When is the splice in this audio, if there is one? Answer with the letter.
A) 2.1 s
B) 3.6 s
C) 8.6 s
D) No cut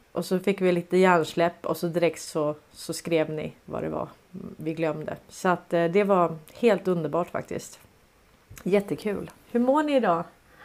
B